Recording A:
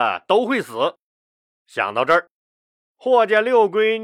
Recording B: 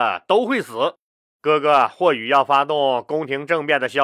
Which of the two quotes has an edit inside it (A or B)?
B